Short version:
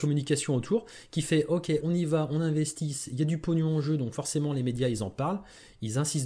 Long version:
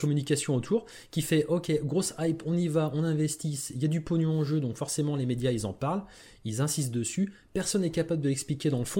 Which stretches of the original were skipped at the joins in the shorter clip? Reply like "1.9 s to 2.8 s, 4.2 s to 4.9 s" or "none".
1.8 s to 2.4 s